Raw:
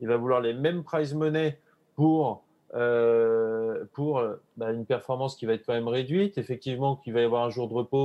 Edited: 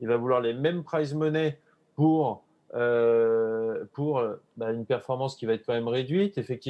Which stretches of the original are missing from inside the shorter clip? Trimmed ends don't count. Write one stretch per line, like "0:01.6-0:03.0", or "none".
none